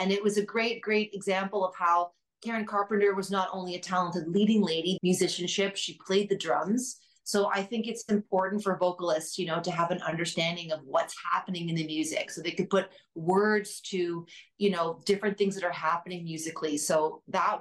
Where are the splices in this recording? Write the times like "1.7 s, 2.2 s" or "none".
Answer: 5.0 s